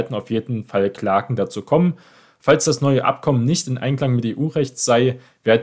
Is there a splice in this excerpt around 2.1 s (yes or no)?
no